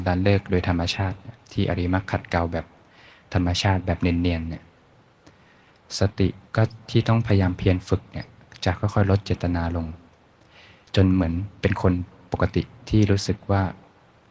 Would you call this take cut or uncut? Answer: cut